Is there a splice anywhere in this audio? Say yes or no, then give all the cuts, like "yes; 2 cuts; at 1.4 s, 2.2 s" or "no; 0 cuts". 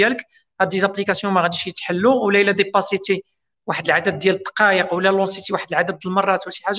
no; 0 cuts